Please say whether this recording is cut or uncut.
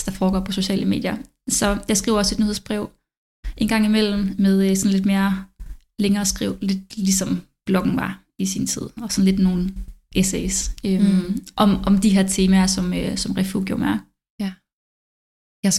uncut